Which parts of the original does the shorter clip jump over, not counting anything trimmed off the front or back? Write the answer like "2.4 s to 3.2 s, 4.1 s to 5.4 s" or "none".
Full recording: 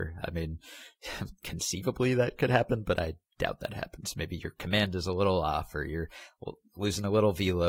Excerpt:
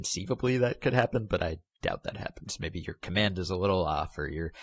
none